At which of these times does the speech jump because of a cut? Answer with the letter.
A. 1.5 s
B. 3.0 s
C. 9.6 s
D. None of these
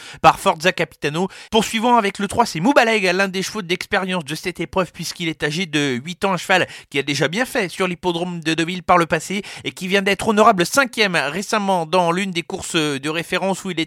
A